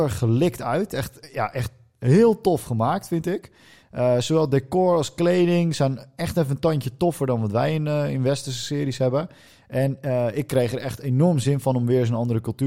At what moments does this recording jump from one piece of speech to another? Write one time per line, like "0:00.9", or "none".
none